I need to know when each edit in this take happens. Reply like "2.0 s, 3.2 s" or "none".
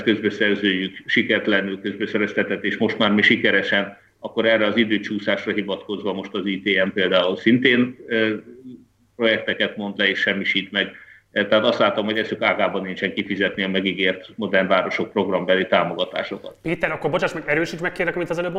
none